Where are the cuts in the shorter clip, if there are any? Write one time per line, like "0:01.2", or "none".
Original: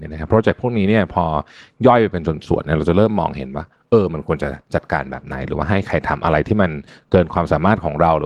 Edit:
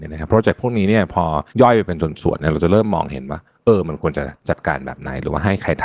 0:01.5